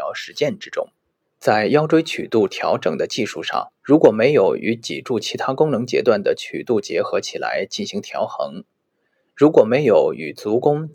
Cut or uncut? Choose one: cut